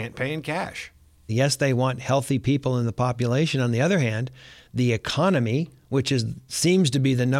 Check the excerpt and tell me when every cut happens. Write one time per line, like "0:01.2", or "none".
0:01.3

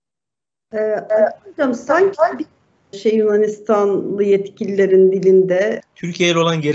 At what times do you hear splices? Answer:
0:02.9
0:05.8

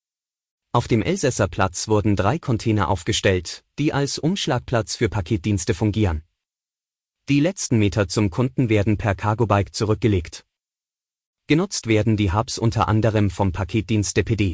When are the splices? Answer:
0:07.1

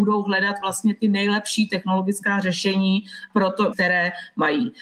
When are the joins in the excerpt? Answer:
0:03.7

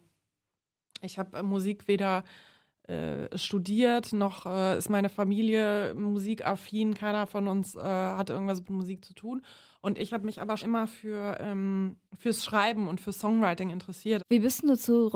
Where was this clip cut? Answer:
0:10.6
0:12.1
0:14.2

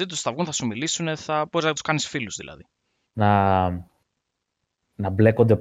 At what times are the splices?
0:03.1

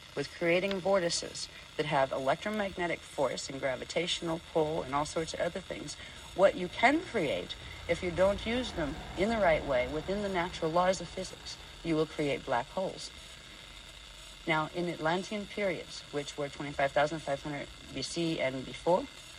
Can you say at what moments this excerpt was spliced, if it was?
none

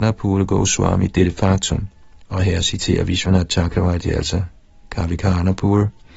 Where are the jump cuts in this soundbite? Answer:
0:02.2

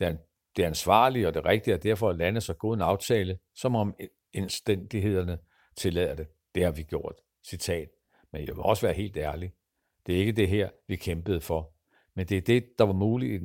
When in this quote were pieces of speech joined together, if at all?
none

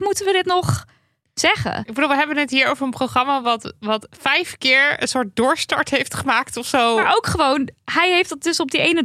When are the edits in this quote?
none

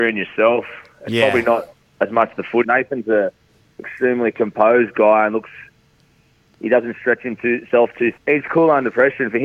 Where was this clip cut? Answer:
0:02.6
0:08.2

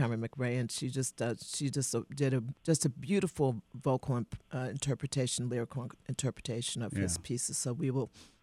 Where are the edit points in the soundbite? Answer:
0:02.6

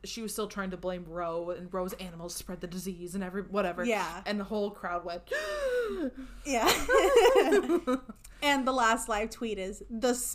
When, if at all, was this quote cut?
0:04.2

